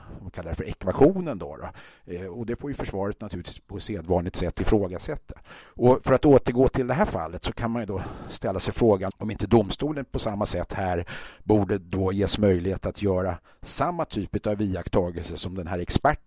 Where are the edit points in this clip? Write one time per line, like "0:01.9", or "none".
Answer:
0:09.1

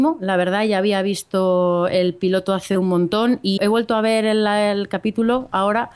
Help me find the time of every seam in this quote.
0:03.6

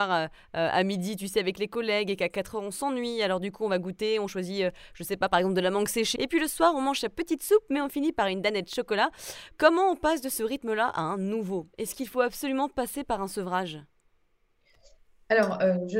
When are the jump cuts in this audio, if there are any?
0:06.2

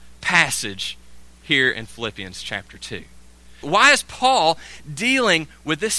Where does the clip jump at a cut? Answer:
0:03.6

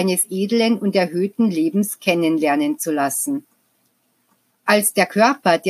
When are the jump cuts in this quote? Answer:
0:04.5

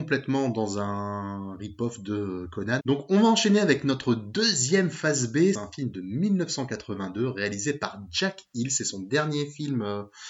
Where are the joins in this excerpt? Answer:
0:02.8
0:05.5

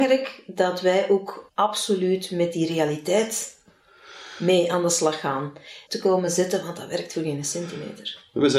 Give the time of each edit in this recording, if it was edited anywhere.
0:01.5
0:05.9

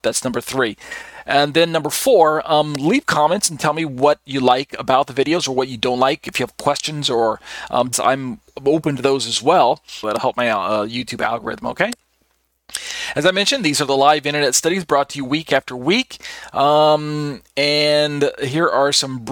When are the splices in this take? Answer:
0:07.9
0:10.0

